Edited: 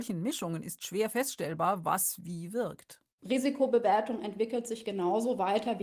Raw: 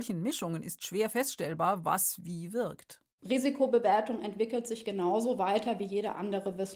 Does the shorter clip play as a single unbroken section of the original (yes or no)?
yes